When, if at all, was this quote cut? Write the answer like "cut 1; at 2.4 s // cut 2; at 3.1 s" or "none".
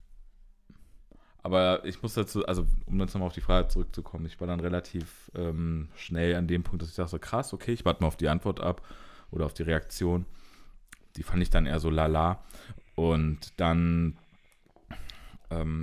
none